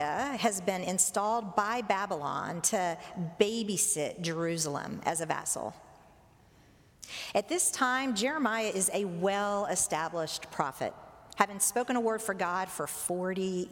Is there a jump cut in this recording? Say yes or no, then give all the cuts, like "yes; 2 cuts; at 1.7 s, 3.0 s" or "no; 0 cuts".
no; 0 cuts